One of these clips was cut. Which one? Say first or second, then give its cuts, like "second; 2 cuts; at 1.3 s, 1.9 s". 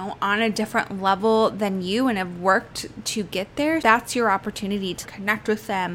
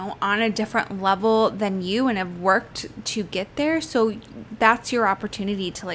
first; 2 cuts; at 3.8 s, 5.0 s